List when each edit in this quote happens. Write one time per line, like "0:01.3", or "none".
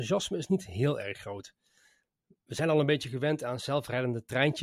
none